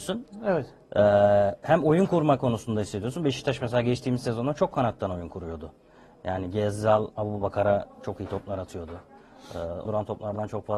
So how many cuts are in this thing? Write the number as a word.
one